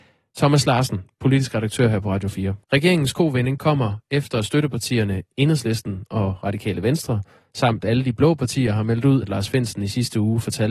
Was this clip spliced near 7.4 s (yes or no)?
no